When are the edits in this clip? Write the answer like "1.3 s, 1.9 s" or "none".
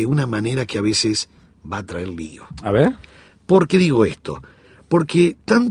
none